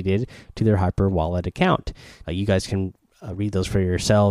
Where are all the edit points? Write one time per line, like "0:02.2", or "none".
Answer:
0:02.2